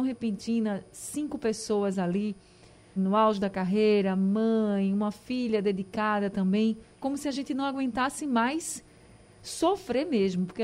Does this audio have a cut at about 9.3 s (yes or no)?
no